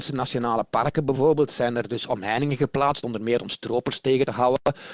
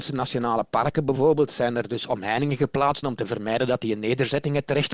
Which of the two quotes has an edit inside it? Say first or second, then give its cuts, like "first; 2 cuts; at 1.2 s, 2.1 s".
second; 1 cut; at 3.0 s